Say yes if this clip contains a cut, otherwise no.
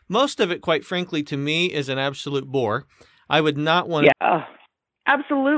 yes